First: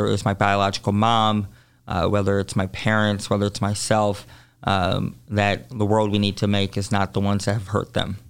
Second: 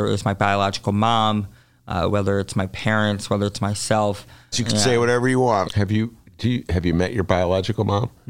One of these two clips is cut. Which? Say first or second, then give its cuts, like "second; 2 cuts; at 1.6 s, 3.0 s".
second; 2 cuts; at 4.5 s, 5.6 s